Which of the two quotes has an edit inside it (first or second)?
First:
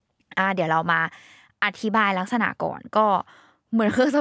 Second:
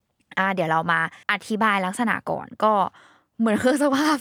second